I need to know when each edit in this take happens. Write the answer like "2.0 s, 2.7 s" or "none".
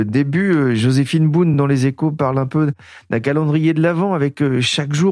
none